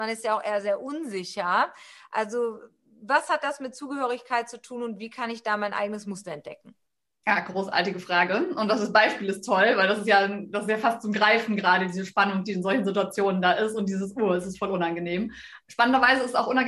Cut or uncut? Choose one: uncut